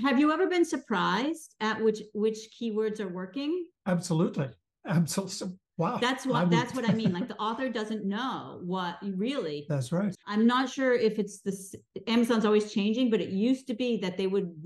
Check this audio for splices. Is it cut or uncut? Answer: cut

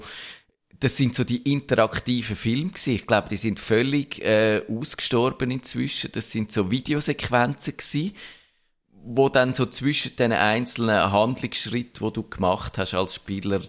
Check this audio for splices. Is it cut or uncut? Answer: uncut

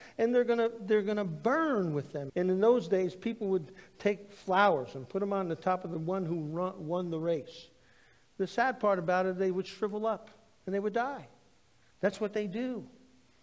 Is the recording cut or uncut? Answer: cut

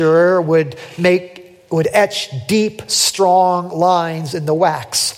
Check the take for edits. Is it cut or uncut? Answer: uncut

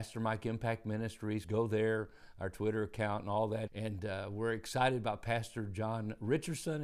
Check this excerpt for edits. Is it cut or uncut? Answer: cut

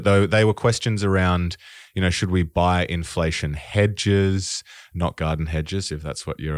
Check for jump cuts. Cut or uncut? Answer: uncut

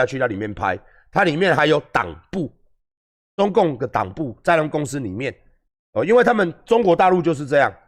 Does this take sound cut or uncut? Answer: uncut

